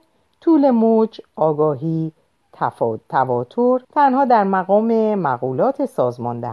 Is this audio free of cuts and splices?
no; 2 cuts; at 2.4 s, 3.8 s

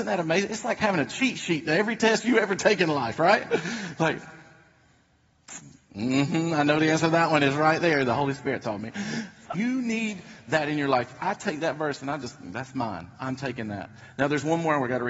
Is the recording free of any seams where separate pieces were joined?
no; 1 cut; at 9.5 s

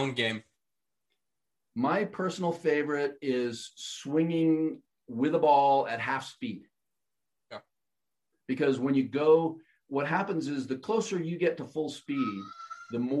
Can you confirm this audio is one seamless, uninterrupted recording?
yes; 0 cuts

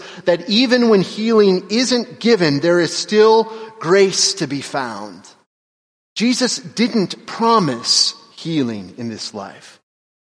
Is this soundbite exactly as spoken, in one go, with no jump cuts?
no; 1 cut; at 6.0 s

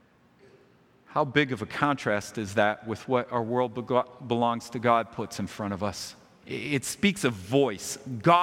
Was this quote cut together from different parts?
yes; 1 cut; at 6.4 s

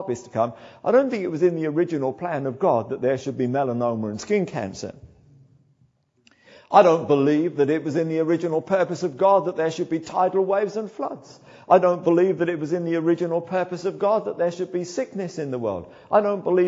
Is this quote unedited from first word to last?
yes; 0 cuts

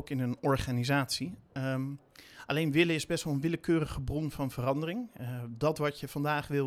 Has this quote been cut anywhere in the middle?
no; 0 cuts

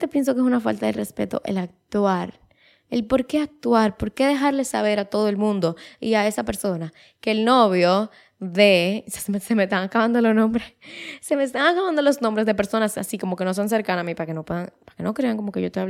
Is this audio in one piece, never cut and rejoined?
yes; 0 cuts

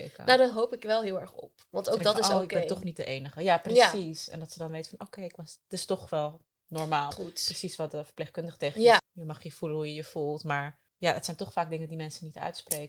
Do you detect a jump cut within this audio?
yes; 3 cuts; at 7.1 s, 9.0 s, 10.9 s

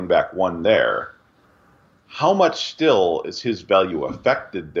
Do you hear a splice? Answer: no; 0 cuts

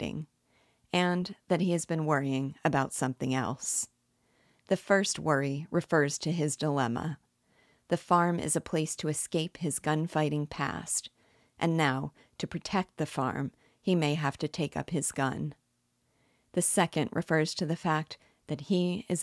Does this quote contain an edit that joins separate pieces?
no; 0 cuts

